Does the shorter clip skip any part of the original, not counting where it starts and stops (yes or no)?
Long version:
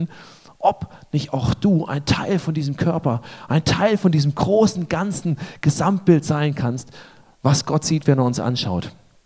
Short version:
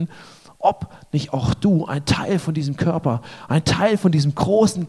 no